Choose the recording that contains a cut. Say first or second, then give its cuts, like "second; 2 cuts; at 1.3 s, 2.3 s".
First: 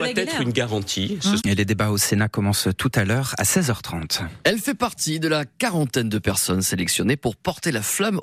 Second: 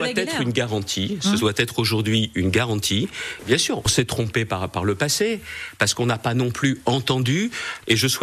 first; 1 cut; at 1.4 s